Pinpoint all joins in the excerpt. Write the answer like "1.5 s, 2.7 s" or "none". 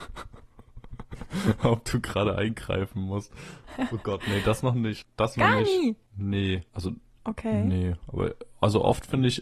5.4 s